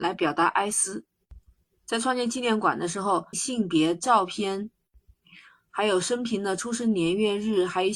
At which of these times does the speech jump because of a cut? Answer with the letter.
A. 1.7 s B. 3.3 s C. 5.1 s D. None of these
B